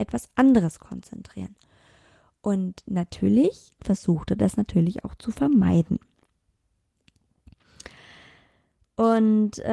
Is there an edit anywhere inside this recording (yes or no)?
yes